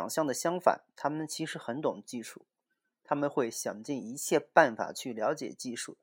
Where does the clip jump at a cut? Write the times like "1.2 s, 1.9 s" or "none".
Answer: none

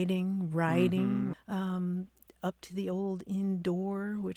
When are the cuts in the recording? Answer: 1.3 s

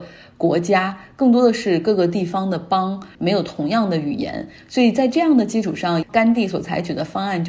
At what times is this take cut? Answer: 6.0 s

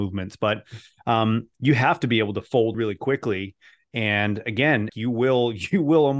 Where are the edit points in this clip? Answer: 2.7 s, 4.9 s

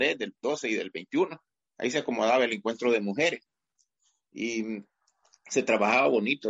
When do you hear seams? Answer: none

